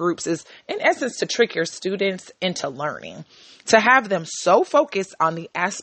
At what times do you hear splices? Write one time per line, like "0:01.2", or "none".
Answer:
none